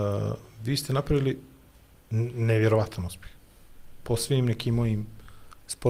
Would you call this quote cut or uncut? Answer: uncut